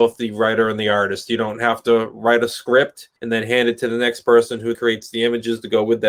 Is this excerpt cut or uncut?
cut